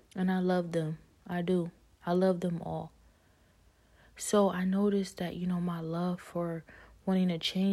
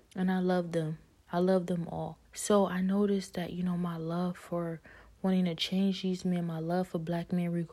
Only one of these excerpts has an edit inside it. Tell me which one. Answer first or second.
second